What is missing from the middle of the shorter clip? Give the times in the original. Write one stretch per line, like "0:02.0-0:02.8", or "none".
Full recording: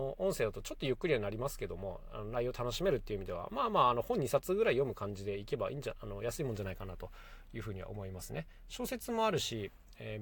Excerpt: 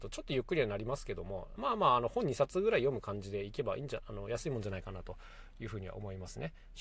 0:02.1-0:03.5